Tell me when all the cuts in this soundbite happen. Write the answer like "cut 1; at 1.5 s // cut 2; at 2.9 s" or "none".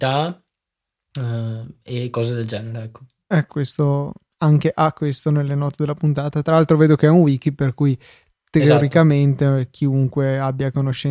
cut 1; at 3.5 s